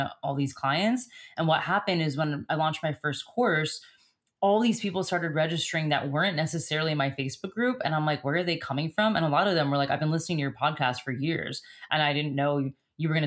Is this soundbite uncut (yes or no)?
yes